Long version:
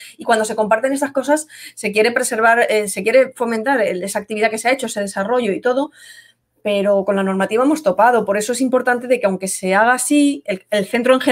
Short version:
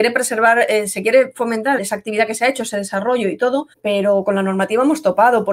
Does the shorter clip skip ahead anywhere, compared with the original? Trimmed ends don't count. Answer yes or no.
yes